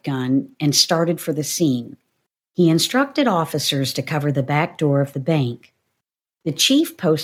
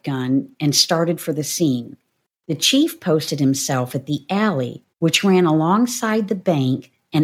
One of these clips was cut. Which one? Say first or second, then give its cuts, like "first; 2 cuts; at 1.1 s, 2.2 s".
second; 2 cuts; at 2.3 s, 4.9 s